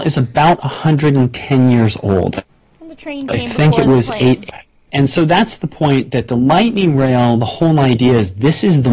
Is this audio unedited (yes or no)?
no